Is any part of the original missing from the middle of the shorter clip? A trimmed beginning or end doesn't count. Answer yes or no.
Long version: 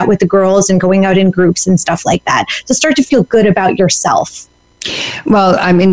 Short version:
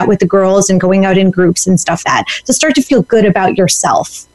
yes